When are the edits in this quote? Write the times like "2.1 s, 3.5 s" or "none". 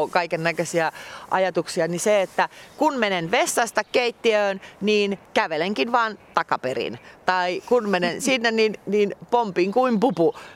none